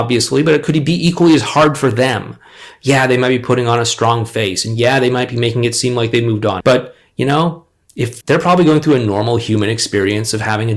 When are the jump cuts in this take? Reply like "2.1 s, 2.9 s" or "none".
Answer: 6.6 s, 8.2 s